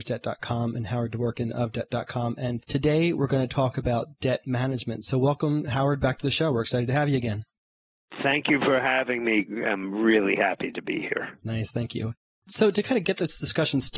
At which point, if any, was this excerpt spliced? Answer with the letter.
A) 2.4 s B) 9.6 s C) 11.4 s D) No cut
D